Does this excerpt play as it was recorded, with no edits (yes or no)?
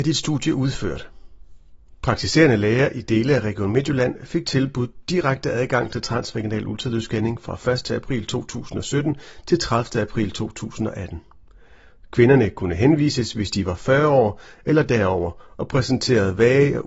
yes